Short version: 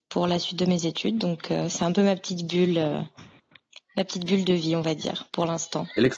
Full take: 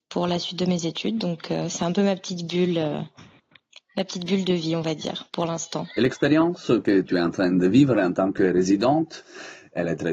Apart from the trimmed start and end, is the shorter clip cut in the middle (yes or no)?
no